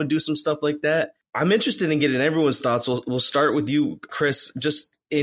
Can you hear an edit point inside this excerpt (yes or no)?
yes